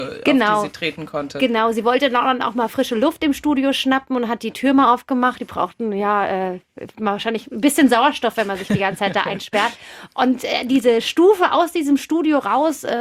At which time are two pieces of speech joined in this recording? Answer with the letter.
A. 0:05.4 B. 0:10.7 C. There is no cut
C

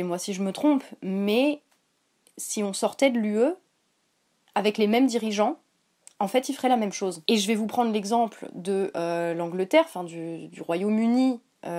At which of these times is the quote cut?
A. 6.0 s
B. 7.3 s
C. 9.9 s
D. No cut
B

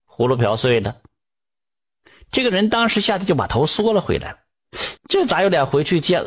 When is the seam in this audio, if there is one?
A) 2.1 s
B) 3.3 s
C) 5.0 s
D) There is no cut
C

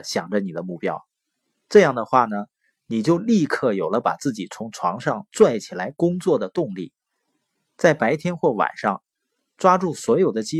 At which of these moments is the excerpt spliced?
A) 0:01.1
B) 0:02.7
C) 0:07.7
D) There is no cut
B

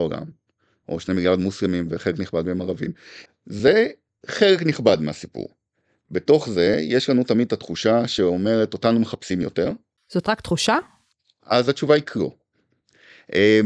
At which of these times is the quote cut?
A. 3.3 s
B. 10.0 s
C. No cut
A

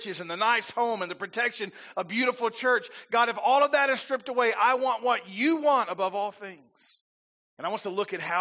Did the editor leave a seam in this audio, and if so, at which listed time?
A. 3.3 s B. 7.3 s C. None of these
B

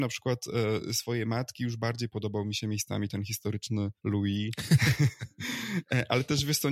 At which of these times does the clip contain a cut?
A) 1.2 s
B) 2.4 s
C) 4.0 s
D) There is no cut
C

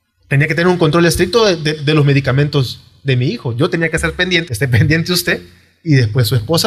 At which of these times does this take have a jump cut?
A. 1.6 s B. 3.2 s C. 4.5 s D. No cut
C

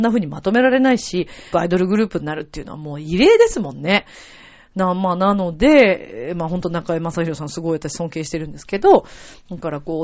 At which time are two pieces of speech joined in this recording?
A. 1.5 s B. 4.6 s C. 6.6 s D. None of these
A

